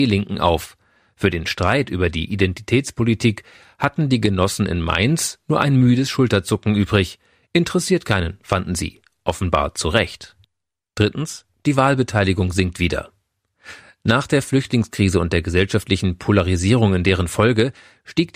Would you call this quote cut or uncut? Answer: uncut